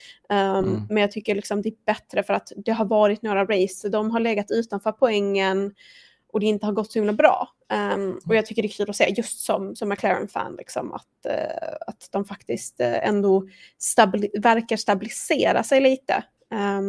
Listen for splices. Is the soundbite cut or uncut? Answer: uncut